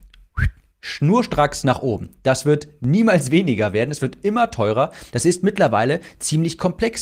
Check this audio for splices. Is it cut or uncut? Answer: cut